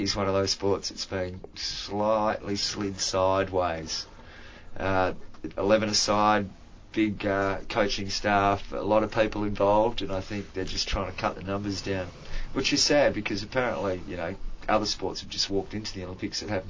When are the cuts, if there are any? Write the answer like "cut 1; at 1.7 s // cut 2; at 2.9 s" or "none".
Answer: none